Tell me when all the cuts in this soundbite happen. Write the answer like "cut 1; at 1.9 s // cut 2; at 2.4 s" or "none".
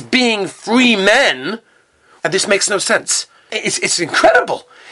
cut 1; at 2.2 s // cut 2; at 3.5 s